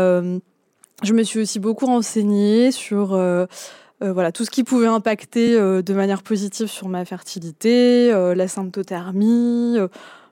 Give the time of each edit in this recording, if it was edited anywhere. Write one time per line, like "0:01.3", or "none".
none